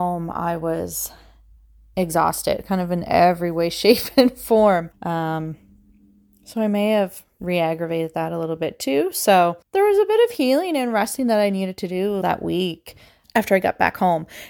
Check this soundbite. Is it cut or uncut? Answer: cut